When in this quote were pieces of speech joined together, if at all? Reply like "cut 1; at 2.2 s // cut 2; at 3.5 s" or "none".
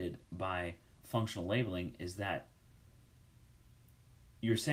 cut 1; at 1.0 s